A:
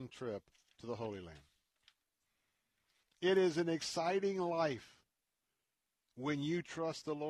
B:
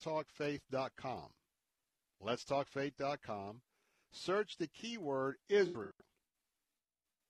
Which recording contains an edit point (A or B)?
A